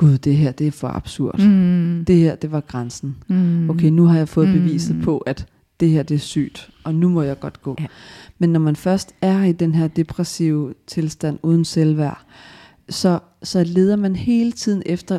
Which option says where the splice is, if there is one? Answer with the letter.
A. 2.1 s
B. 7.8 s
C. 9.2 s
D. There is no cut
B